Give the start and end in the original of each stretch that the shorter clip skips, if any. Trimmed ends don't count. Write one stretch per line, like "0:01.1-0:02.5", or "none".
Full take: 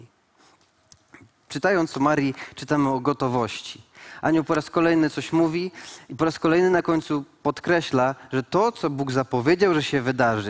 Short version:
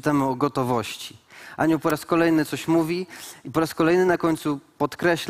none

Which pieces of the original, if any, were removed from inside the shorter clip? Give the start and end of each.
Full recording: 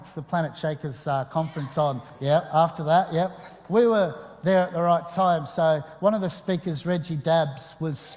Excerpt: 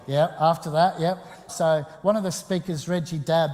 0:03.6-0:05.5

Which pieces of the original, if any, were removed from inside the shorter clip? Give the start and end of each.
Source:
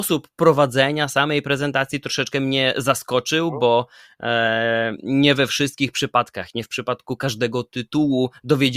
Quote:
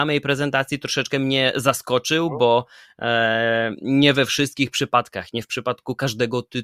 none

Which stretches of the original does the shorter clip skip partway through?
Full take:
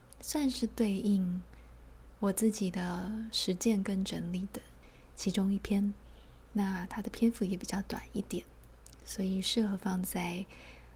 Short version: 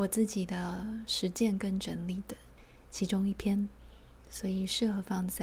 0:06.4-0:08.9

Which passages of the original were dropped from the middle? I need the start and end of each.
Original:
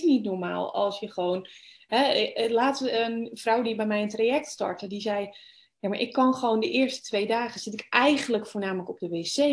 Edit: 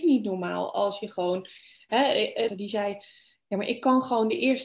0:02.5-0:04.8

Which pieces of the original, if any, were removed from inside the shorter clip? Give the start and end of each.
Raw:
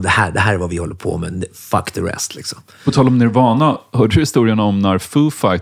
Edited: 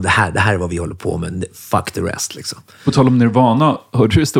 none

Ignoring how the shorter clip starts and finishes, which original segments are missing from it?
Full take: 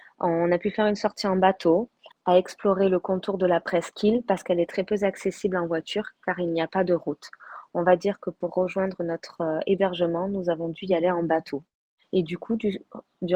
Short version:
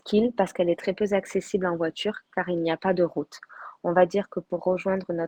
none

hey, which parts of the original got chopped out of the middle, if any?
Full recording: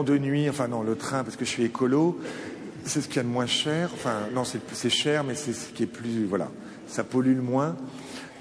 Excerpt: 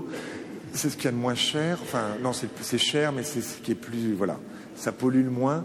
none

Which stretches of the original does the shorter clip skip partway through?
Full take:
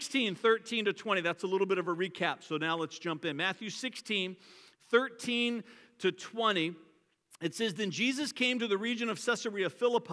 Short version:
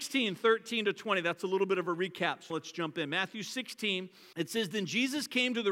0:02.5-0:02.8
0:04.6-0:07.4

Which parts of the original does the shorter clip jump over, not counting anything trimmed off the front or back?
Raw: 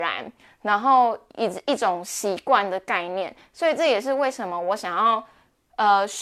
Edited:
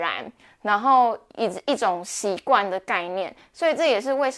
none

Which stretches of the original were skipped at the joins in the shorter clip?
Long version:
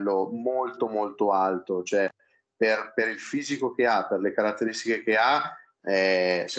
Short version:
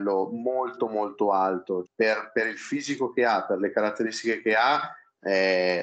0:01.8-0:02.5

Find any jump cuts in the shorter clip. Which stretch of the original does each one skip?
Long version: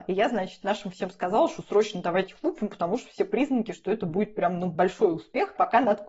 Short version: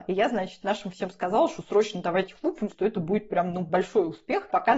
0:02.7-0:03.7

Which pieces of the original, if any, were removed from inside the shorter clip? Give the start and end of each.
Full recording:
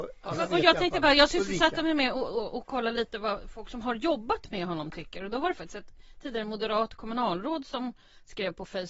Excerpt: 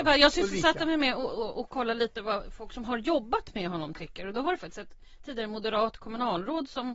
none

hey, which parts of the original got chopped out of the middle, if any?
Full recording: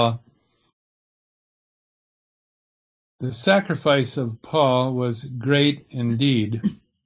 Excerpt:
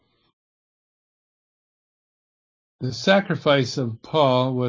none

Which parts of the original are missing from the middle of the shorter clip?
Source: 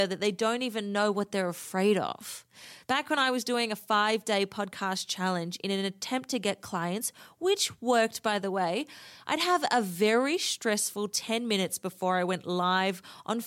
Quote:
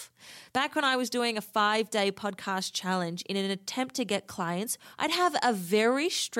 0:07.3-0:09.2

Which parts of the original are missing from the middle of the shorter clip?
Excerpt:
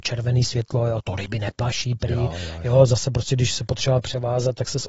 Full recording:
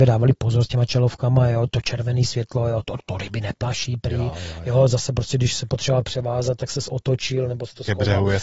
0:02.8-0:03.0

